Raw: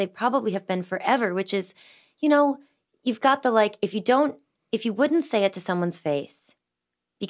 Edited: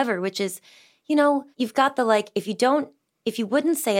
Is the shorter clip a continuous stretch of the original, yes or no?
no